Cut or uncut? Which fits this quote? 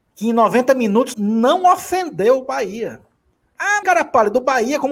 cut